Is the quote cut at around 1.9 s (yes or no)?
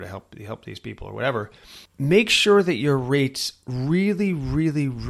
yes